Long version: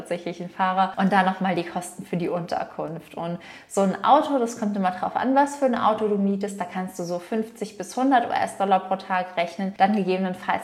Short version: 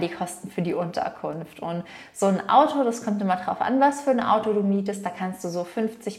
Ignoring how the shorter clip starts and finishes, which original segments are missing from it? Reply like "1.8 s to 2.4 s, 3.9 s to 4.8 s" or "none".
none